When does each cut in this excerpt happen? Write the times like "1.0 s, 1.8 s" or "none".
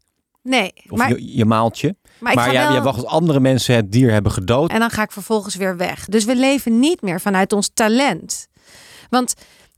4.7 s, 6.1 s